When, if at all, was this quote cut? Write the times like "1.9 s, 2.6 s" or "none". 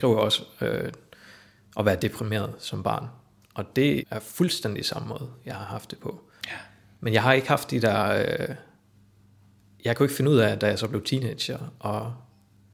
4.0 s